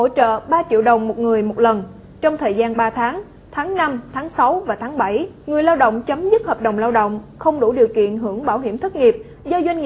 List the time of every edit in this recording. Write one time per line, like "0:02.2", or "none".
0:05.4